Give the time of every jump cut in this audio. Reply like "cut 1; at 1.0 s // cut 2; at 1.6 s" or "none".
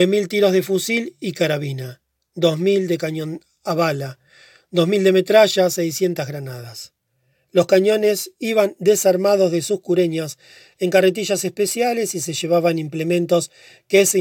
none